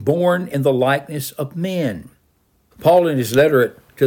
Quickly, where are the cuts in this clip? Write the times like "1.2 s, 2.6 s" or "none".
2.7 s